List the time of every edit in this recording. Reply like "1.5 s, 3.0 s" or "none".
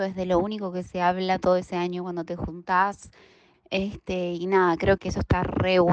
3.5 s, 5.0 s